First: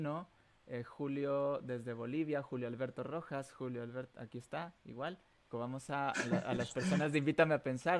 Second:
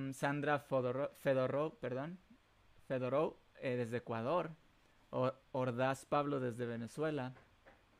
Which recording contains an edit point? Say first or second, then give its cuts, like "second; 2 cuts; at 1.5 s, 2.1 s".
first; 1 cut; at 5.5 s